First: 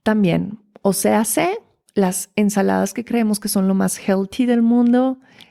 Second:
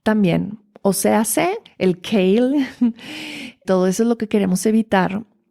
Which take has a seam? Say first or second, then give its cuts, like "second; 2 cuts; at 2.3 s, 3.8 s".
second; 2 cuts; at 1.7 s, 3.6 s